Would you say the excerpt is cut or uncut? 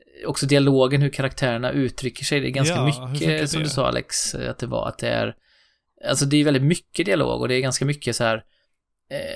uncut